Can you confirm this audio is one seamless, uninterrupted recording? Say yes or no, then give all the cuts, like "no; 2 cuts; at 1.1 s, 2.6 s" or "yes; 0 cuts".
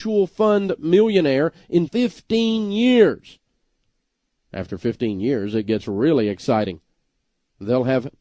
no; 1 cut; at 1.9 s